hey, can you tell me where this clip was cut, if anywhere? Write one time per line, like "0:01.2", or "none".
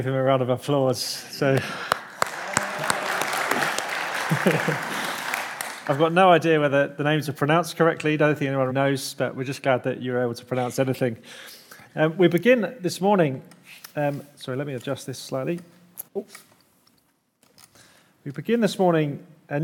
0:08.7
0:16.1